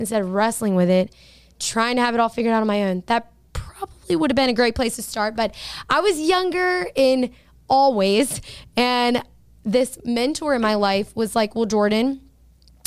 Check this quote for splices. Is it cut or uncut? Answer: uncut